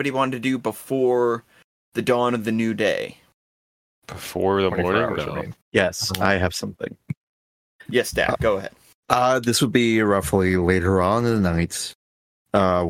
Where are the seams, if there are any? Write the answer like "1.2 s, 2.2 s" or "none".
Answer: 5.6 s